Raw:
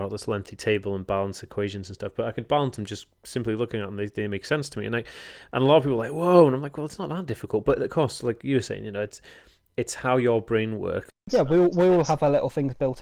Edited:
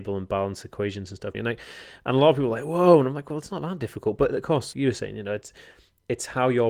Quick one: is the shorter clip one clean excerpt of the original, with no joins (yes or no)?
no